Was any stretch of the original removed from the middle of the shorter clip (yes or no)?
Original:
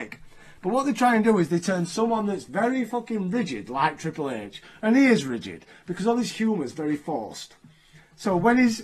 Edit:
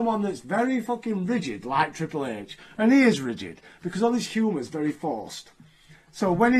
no